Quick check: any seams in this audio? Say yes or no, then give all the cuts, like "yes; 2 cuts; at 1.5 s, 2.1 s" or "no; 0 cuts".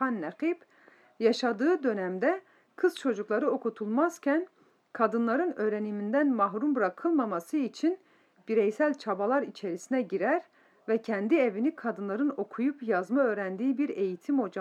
no; 0 cuts